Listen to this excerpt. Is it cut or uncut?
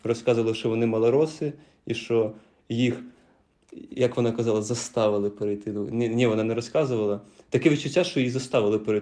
uncut